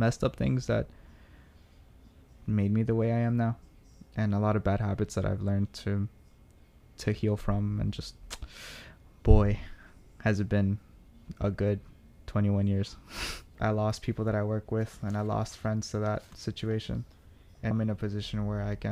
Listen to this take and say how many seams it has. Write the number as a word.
two